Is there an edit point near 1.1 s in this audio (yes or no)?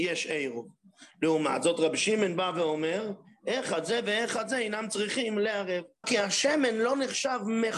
no